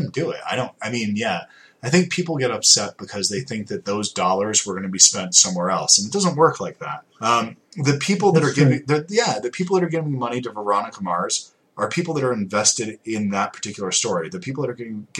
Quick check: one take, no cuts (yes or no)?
no